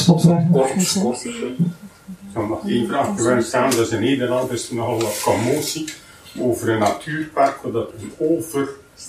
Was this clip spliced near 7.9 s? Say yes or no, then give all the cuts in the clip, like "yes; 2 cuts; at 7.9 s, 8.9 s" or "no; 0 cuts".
yes; 1 cut; at 7.9 s